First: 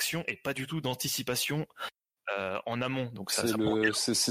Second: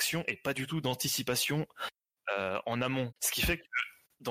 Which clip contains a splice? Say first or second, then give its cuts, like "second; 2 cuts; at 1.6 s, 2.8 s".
second; 1 cut; at 3.1 s